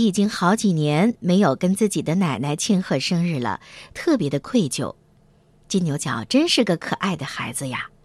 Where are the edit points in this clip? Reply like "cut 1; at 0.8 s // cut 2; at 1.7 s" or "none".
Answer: none